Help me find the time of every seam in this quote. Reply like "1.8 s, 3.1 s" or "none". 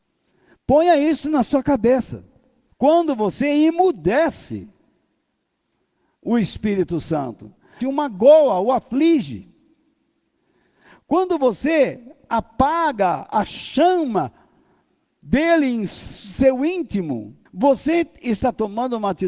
2.7 s, 7.8 s, 17.5 s